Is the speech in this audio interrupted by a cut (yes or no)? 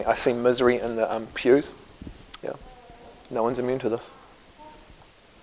yes